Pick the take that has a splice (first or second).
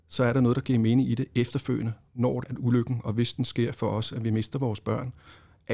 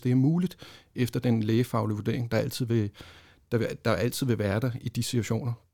first